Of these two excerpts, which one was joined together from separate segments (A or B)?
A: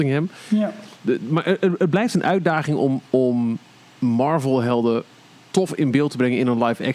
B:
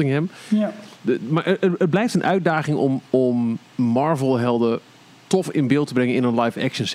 B